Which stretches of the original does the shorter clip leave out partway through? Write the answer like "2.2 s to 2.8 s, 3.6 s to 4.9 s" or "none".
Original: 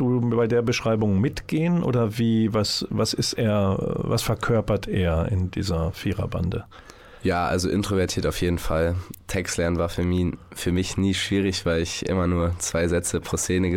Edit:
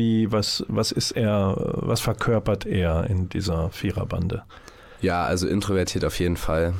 none